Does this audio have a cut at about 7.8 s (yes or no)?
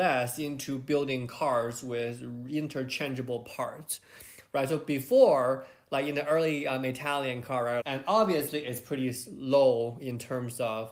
yes